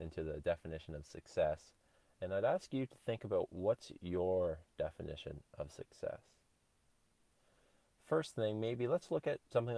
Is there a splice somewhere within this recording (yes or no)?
no